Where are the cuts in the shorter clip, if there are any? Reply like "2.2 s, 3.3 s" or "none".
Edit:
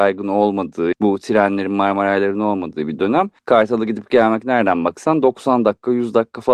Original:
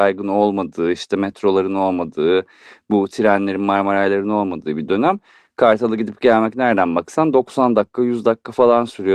0.9 s, 3.4 s